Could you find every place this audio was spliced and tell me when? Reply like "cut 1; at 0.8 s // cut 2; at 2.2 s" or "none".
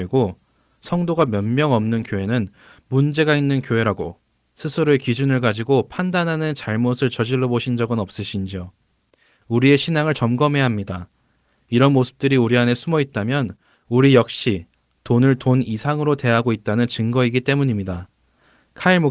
none